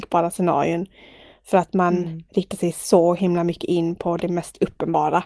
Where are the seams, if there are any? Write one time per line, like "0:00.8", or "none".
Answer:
none